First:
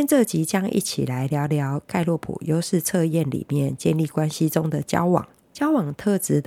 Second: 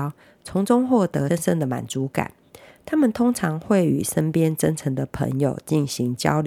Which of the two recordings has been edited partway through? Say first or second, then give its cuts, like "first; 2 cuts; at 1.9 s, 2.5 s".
second; 1 cut; at 1.3 s